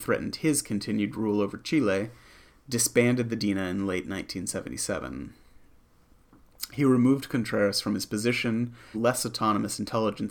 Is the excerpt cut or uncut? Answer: cut